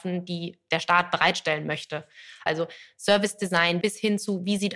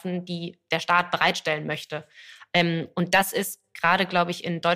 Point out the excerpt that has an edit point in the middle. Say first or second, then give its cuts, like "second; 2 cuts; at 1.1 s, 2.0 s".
first; 2 cuts; at 2.5 s, 3.8 s